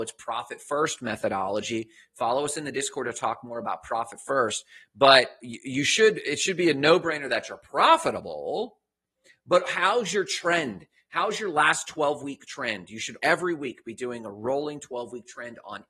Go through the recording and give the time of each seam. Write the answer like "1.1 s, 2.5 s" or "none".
13.2 s